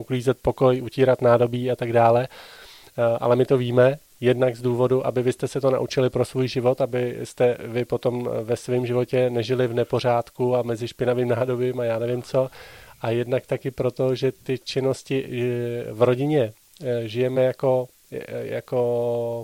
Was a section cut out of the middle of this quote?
no; 0 cuts

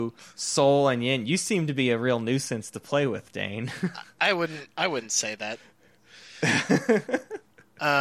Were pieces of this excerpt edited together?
no; 0 cuts

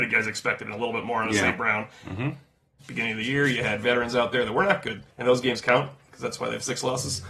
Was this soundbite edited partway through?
yes; 2 cuts; at 2.8 s, 5.1 s

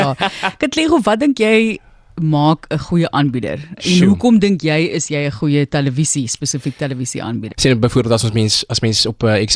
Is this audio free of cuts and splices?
no; 1 cut; at 7.5 s

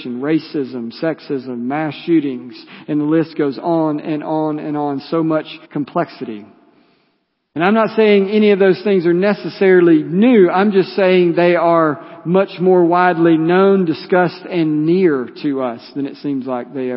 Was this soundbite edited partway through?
yes; 1 cut; at 5.6 s

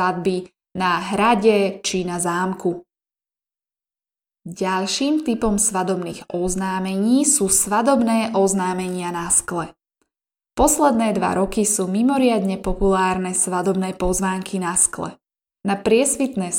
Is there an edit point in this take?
yes; 1 cut; at 15.6 s

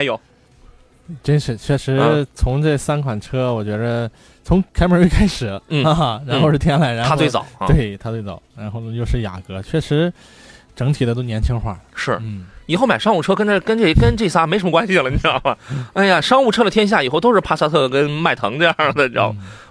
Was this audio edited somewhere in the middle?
no; 0 cuts

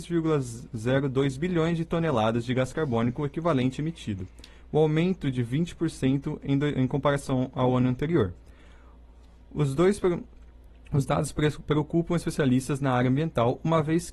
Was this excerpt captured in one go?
yes; 0 cuts

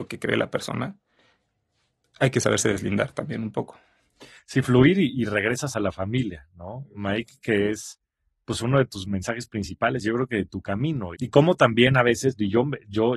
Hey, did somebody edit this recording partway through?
yes; 1 cut; at 11.1 s

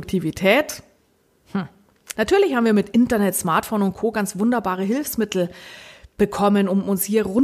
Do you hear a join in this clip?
yes; 1 cut; at 2.1 s

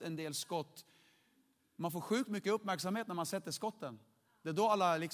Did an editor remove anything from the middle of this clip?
no; 0 cuts

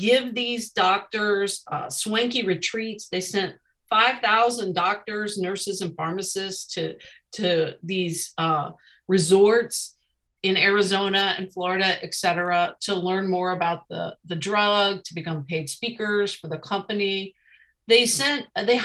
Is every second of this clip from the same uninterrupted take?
yes; 0 cuts

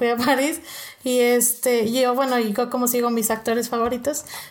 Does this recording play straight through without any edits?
yes; 0 cuts

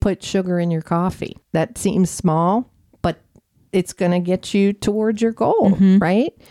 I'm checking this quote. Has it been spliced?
yes; 1 cut; at 1.4 s

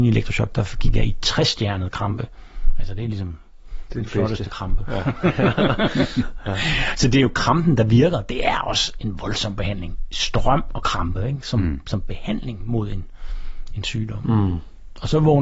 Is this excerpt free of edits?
yes; 0 cuts

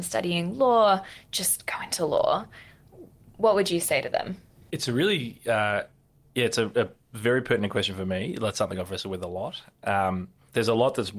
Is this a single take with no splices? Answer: yes; 0 cuts

